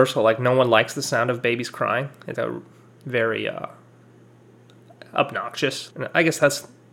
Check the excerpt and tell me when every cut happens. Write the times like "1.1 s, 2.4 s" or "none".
2.3 s, 5.9 s

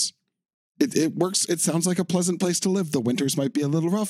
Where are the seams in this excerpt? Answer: none

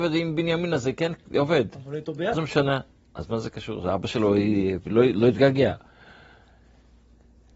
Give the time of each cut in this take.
2.3 s

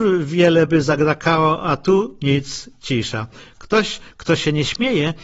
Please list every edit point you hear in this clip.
none

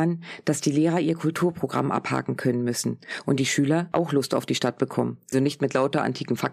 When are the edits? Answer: 5.3 s

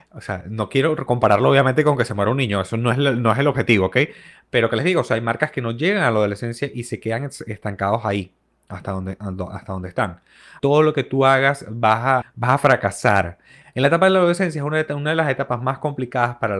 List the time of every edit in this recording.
10.6 s, 12.2 s, 13.6 s

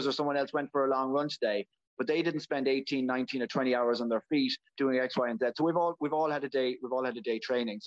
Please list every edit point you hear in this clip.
none

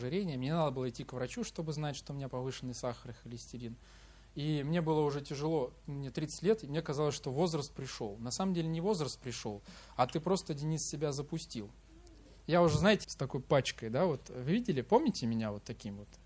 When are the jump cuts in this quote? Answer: 13.0 s

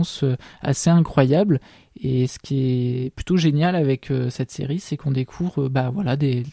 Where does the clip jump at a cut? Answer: none

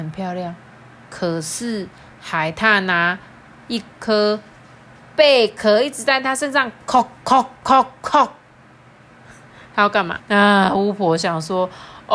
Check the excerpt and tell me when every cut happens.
10.2 s

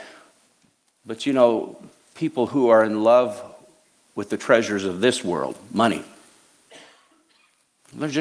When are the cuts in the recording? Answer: none

